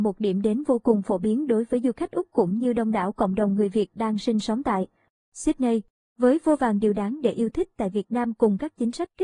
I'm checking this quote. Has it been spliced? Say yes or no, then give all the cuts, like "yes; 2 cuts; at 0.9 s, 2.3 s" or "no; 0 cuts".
no; 0 cuts